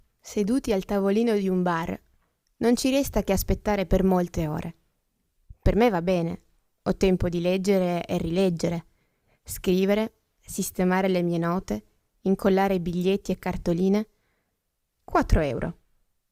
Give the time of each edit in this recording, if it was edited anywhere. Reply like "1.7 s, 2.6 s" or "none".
14.9 s